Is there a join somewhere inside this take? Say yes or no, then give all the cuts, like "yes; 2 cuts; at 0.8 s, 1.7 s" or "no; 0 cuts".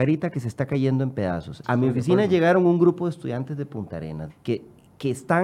yes; 2 cuts; at 1.6 s, 4.3 s